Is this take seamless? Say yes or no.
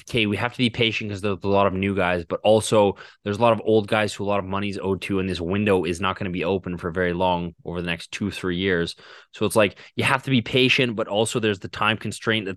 yes